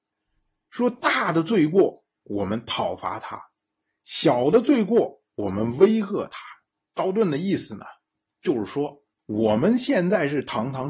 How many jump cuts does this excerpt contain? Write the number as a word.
one